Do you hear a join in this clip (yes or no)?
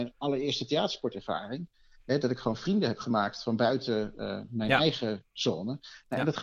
no